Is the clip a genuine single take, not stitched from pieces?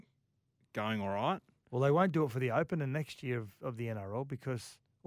yes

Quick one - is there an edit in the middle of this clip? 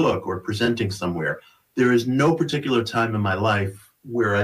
no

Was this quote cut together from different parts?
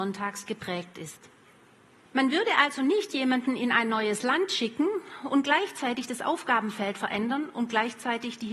yes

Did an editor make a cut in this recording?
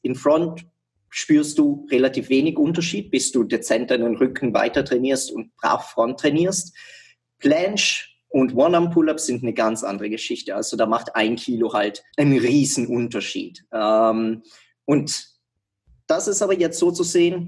yes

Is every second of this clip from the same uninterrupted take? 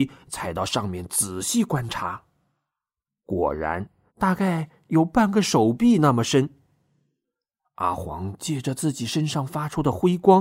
no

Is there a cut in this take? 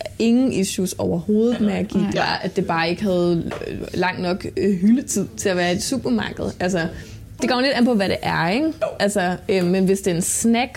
yes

